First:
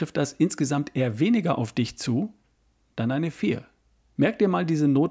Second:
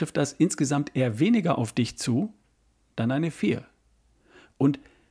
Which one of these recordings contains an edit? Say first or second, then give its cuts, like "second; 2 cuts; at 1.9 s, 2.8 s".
first; 1 cut; at 4.2 s